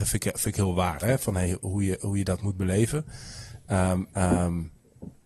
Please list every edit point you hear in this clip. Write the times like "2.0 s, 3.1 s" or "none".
1.0 s, 4.1 s